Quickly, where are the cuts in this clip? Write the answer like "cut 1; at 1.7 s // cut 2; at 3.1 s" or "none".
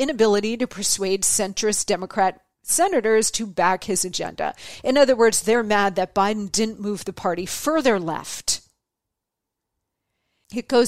none